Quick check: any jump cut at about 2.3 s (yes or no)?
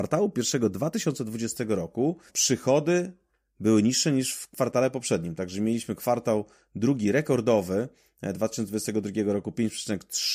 yes